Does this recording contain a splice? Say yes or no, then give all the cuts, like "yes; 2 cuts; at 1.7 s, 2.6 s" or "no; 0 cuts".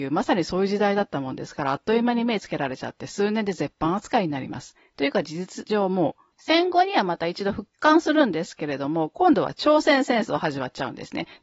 yes; 1 cut; at 6.3 s